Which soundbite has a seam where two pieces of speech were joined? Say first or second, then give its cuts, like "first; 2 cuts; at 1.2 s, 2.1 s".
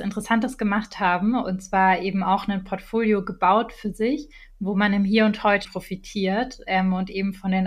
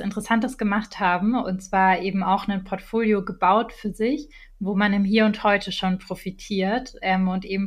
first; 1 cut; at 5.6 s